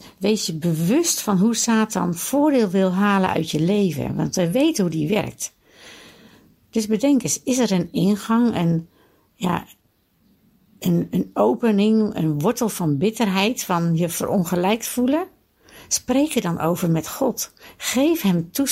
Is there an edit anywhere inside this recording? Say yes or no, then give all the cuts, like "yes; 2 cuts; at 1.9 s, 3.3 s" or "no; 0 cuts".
no; 0 cuts